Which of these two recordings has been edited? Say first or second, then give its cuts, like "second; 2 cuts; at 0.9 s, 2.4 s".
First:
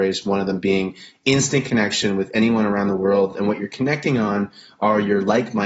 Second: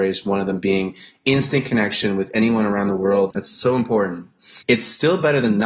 second; 2 cuts; at 3.3 s, 4.6 s